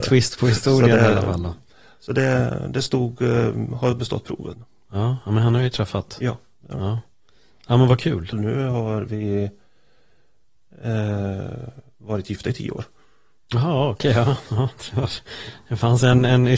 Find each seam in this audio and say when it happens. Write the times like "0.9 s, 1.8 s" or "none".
8.3 s